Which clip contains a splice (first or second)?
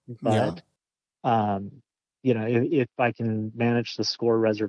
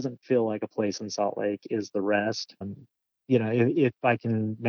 second